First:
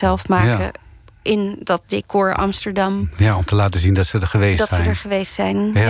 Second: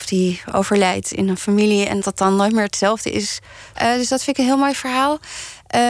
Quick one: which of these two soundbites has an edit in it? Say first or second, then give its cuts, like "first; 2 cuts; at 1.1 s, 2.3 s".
second; 2 cuts; at 2.0 s, 3.7 s